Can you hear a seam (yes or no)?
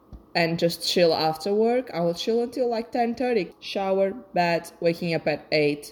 yes